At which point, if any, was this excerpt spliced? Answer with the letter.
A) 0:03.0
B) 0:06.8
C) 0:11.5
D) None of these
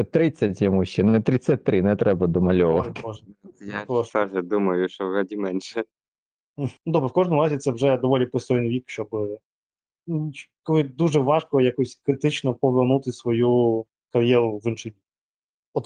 B